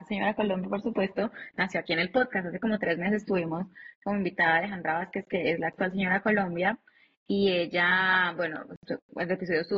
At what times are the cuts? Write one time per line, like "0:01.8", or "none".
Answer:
none

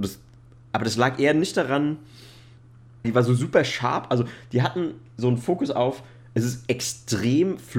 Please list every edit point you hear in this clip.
0:03.0

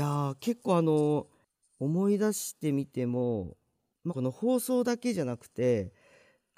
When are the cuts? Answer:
0:04.1

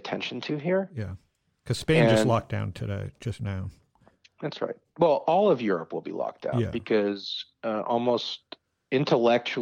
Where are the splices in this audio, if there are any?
none

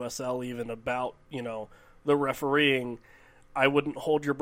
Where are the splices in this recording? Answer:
none

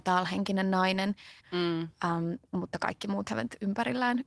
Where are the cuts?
0:01.4

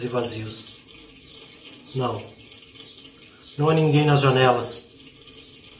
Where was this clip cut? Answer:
none

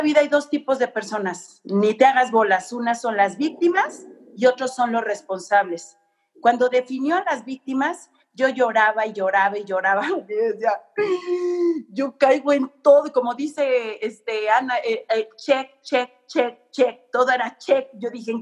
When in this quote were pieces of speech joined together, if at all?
none

